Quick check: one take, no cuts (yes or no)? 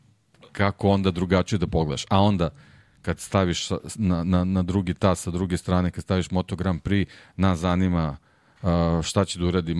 yes